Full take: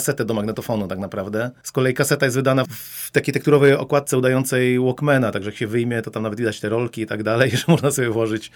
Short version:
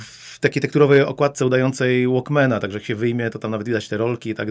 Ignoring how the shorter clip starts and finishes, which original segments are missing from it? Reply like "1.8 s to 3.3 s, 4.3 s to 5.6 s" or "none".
none